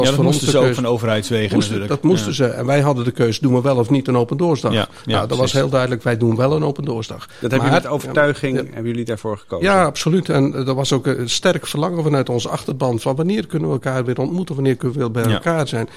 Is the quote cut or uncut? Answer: uncut